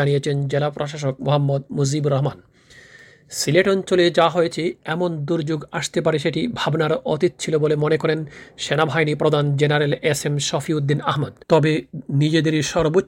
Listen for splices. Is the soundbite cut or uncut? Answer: cut